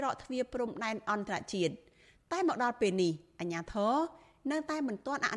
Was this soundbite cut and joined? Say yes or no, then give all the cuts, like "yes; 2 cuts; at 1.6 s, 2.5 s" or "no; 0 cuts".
no; 0 cuts